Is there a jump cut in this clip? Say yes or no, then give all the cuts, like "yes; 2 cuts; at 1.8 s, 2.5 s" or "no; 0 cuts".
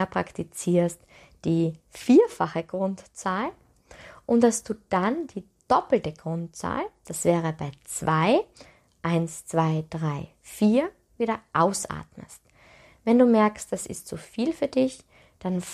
no; 0 cuts